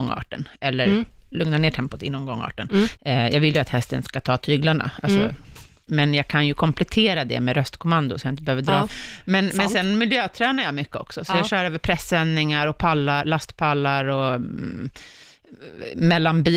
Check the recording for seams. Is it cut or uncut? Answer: cut